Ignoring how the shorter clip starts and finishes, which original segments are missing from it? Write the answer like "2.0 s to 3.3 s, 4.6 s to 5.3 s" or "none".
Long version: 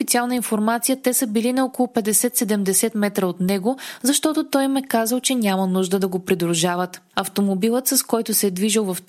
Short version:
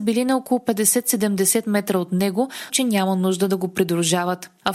4.0 s to 5.2 s